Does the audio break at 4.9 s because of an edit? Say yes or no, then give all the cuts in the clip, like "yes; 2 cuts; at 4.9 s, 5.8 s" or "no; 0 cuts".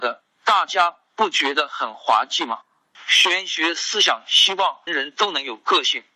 yes; 2 cuts; at 2.9 s, 4.9 s